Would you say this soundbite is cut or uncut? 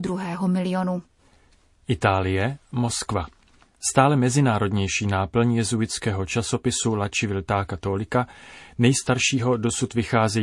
uncut